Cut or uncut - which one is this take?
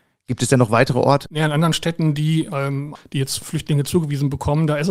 cut